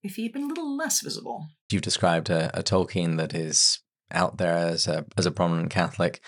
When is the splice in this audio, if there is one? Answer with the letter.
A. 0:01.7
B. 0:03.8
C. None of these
A